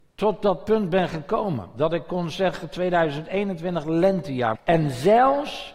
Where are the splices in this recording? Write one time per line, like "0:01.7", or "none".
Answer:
0:04.5